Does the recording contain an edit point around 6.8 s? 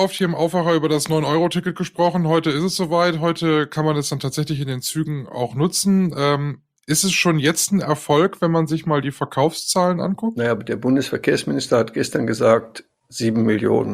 no; 0 cuts

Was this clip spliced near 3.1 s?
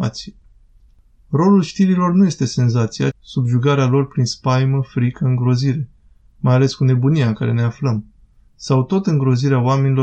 yes; 1 cut; at 3.1 s

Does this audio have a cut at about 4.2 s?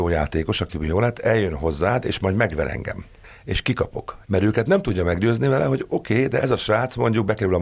yes; 1 cut; at 4.2 s

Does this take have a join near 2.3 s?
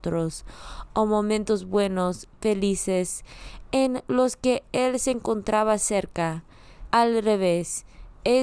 no; 1 cut; at 6.9 s

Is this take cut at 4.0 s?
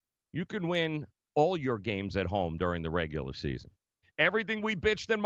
yes; 1 cut; at 4.0 s

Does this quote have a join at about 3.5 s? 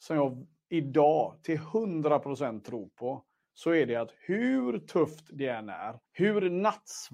no; 1 cut; at 6.1 s

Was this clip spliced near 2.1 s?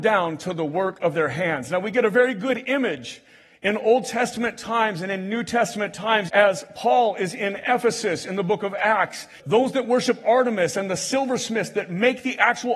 no; 2 cuts; at 6.3 s, 9.4 s

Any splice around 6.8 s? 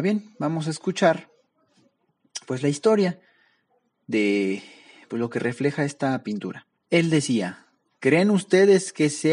yes; 1 cut; at 6.8 s

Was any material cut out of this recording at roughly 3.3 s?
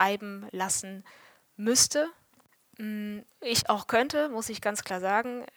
yes; 1 cut; at 3.3 s

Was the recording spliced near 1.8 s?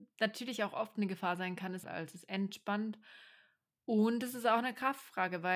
yes; 1 cut; at 1.8 s

